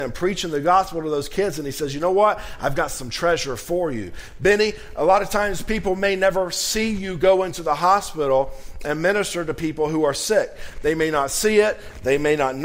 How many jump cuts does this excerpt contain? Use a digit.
0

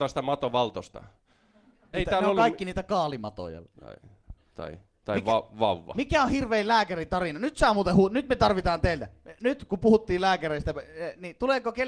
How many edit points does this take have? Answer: 2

